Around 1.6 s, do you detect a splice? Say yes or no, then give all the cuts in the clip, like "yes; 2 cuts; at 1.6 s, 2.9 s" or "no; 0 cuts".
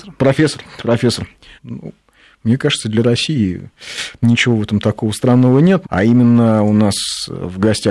yes; 2 cuts; at 1.6 s, 5.8 s